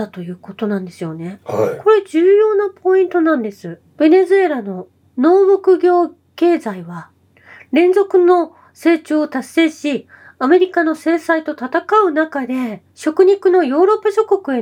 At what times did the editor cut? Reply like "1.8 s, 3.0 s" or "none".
3.8 s

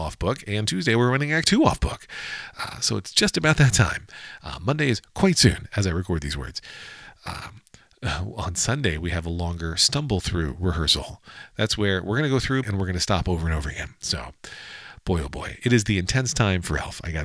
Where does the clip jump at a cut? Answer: 12.6 s

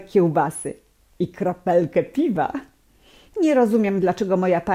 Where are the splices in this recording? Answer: none

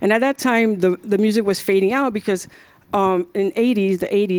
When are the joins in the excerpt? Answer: none

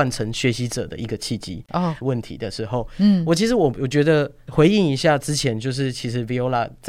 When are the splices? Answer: 2.0 s

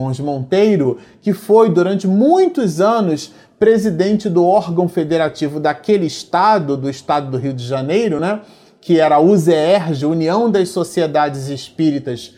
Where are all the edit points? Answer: none

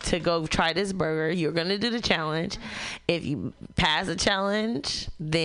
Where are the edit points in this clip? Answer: none

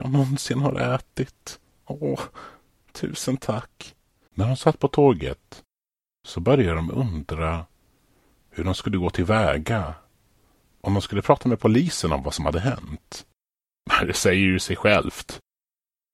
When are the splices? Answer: 4.3 s

